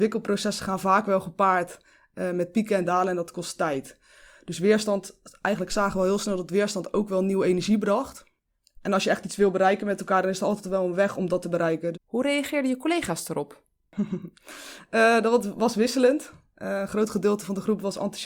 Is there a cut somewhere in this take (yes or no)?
yes